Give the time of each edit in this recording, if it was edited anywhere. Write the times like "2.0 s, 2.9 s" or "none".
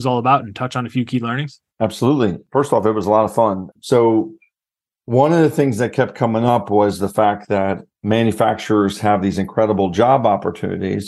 1.7 s, 3.7 s